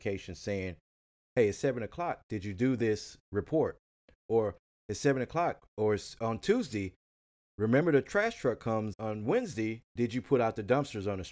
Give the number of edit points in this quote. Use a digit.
1